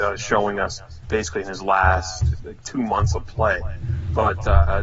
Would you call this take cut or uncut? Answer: cut